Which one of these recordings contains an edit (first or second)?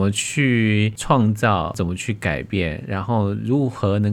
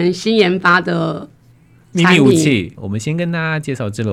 second